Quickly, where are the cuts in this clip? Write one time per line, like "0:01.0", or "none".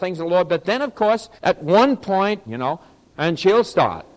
0:01.4
0:02.5